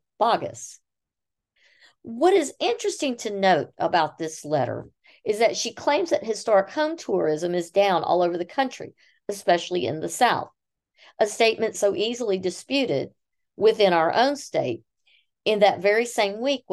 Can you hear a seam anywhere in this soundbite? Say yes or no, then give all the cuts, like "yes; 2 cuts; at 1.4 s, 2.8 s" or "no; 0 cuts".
no; 0 cuts